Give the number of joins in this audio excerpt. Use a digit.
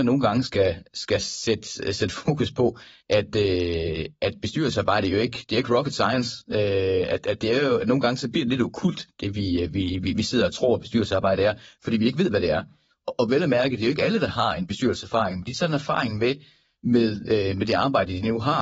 2